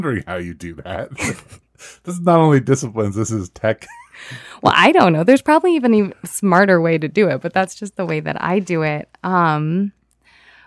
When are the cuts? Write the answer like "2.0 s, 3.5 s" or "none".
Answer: none

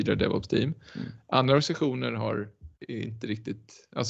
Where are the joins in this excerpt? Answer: 2.8 s

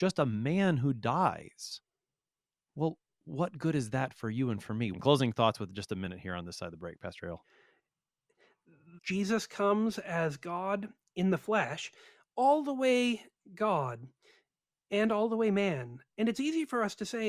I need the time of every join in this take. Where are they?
4.9 s, 9.0 s

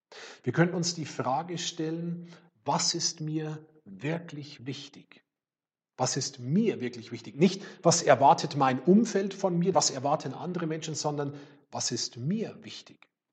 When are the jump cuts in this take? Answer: 9.7 s

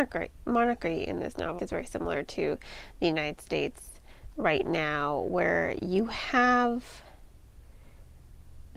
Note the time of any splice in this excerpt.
1.6 s

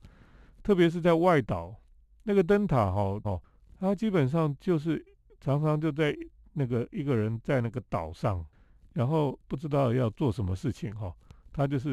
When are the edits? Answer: 3.2 s

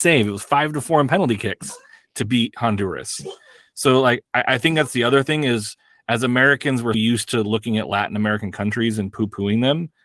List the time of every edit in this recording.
6.9 s

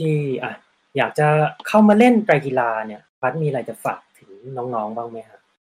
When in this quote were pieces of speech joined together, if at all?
3.1 s

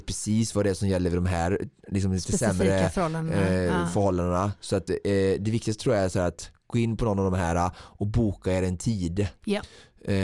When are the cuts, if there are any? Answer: none

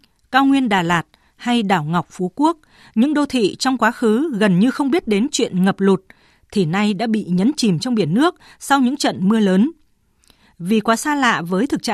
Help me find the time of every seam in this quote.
none

